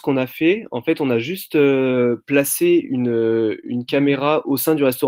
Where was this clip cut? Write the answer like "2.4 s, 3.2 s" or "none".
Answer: none